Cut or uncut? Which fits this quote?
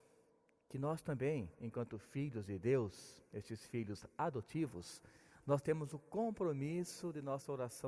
uncut